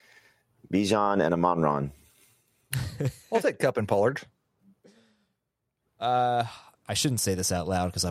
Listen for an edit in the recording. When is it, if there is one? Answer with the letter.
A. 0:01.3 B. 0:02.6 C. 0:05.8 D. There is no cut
D